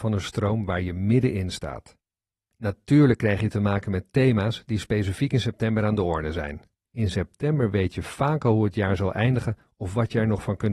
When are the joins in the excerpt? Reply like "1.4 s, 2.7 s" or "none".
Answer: 2.5 s, 6.8 s